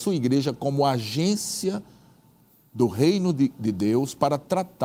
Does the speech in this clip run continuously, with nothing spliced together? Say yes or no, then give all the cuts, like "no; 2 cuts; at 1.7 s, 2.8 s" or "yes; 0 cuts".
yes; 0 cuts